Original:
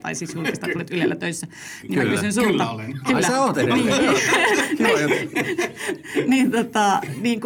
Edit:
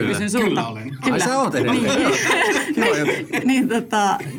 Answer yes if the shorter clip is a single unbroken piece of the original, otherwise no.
no